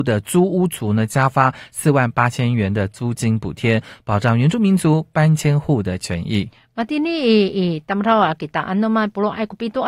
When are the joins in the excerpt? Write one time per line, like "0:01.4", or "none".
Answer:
none